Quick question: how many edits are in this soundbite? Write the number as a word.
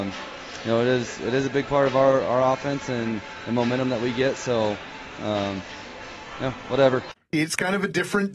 one